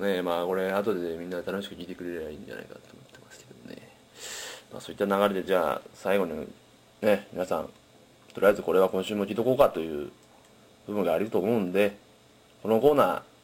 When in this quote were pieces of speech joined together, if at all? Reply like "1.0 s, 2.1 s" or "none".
none